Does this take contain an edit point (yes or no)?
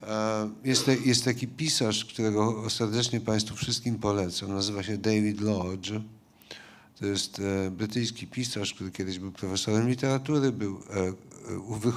no